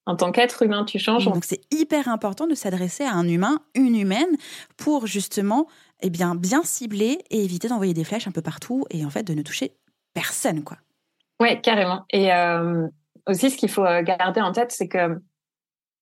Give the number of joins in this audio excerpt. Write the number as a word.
one